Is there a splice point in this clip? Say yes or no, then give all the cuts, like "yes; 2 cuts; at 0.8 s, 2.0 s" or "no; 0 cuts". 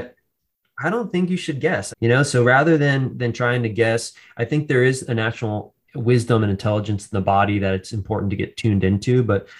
yes; 2 cuts; at 1.9 s, 5.8 s